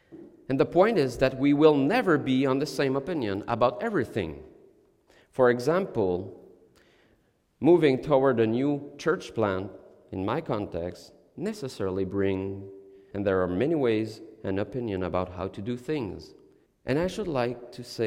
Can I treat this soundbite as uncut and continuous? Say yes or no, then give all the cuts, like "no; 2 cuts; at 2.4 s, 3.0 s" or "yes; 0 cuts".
no; 2 cuts; at 13.1 s, 16.7 s